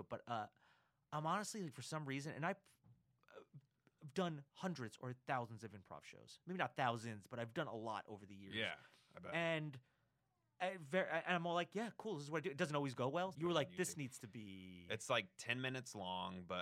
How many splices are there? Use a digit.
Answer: 2